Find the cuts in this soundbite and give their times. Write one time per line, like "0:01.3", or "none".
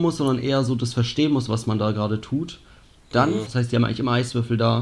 0:03.5